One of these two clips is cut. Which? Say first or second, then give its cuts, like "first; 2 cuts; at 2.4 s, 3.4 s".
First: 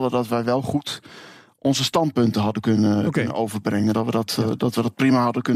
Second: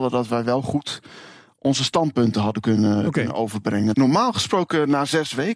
second; 1 cut; at 3.9 s